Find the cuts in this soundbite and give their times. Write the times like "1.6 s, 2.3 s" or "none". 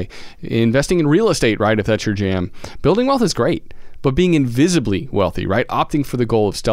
none